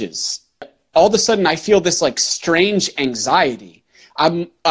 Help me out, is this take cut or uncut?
uncut